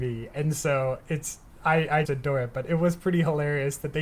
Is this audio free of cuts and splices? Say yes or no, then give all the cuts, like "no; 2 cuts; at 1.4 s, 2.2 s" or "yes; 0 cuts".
no; 1 cut; at 2.0 s